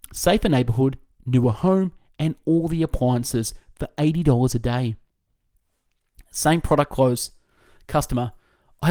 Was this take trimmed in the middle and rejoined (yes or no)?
no